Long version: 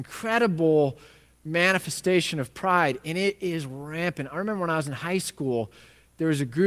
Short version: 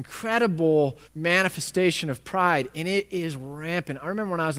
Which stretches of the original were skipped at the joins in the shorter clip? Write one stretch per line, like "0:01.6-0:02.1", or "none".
0:01.1-0:01.3